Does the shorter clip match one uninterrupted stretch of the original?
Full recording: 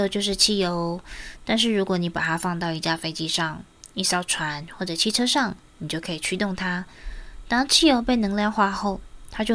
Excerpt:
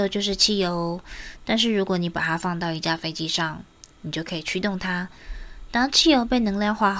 no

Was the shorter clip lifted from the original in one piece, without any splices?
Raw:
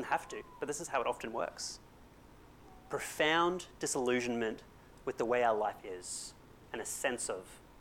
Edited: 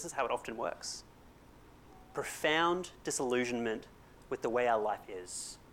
yes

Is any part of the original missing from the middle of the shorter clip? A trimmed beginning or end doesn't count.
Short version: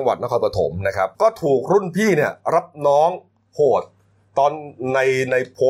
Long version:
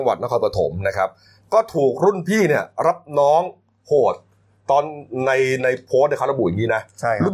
yes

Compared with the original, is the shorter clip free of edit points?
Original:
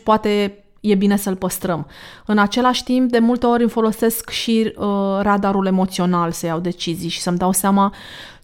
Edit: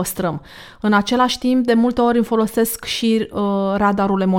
yes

